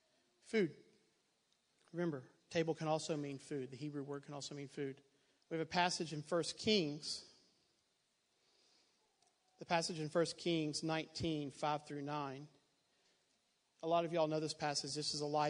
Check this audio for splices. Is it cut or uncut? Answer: cut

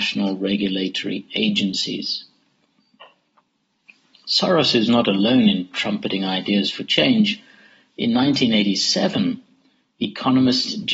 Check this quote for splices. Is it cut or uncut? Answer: uncut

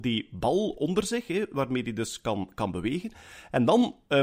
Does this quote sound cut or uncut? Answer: uncut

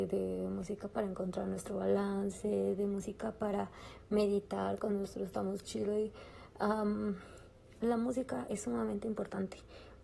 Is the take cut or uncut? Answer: uncut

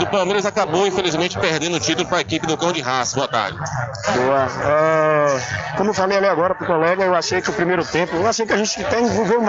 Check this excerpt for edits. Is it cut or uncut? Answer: cut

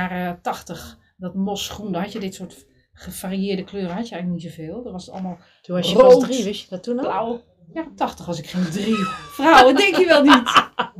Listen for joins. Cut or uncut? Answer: uncut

